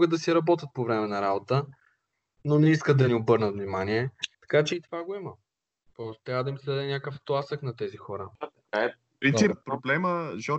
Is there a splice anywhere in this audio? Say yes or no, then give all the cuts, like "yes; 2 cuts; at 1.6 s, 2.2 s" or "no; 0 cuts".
yes; 2 cuts; at 4.3 s, 9.5 s